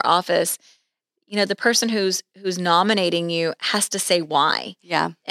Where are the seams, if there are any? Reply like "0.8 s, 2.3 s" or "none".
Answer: none

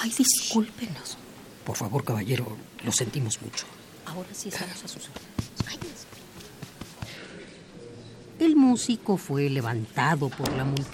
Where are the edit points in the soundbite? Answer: none

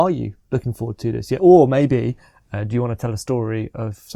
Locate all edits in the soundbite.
none

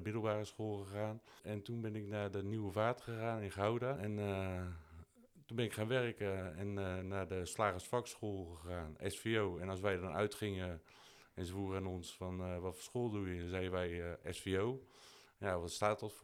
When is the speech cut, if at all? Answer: 4.0 s

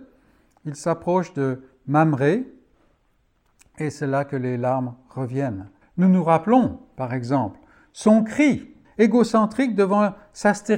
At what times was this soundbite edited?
5.8 s, 8.8 s

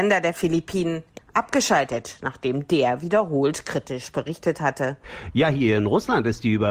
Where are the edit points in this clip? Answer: 1.2 s

